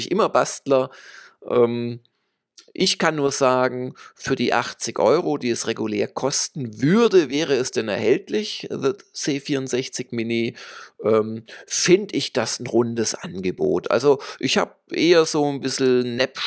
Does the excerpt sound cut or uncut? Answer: uncut